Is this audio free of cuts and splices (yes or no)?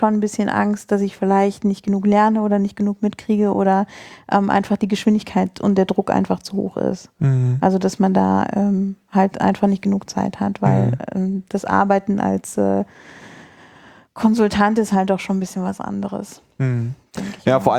yes